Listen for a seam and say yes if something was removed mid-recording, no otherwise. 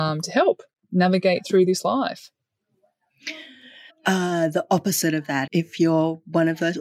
yes